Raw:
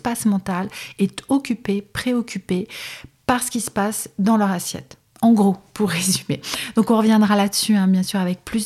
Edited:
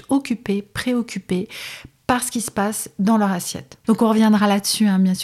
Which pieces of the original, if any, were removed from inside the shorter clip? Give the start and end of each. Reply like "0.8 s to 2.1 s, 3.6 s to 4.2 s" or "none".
5.0 s to 6.7 s

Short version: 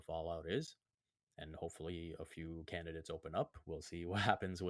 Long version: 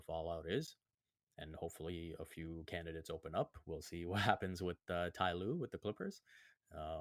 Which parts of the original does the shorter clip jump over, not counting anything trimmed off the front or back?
none

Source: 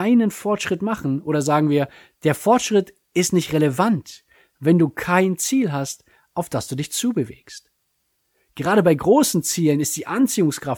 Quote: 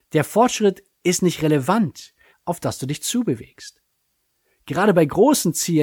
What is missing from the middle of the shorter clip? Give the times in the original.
4.4 s to 6.2 s

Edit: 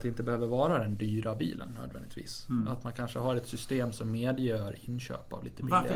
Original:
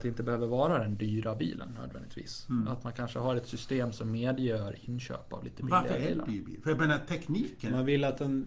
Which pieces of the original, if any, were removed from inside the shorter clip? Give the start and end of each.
none

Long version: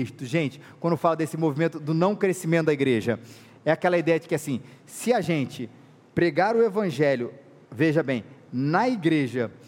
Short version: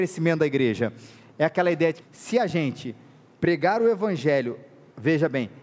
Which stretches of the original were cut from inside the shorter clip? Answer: 4.3 s to 4.7 s

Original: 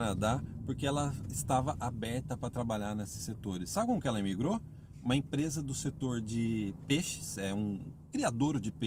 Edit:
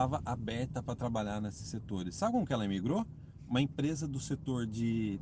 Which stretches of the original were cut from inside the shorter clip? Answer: none

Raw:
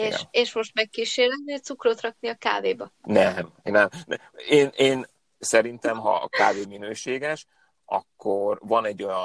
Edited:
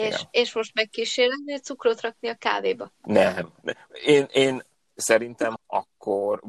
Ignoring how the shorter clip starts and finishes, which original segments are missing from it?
3.6 s to 4.0 s, 6.0 s to 7.7 s

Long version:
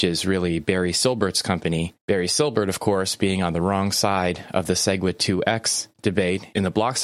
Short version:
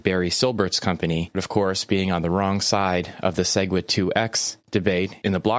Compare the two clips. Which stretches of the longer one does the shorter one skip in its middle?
2.0 s to 2.7 s

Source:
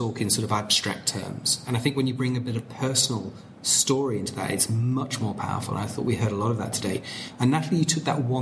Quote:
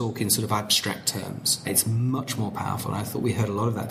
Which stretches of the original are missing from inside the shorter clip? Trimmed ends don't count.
1.6 s to 4.5 s

